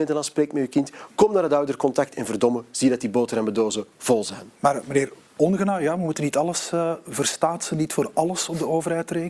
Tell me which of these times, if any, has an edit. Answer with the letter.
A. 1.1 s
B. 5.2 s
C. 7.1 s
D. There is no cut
D